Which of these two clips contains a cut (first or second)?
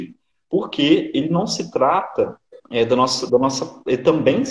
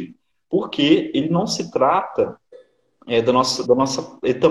first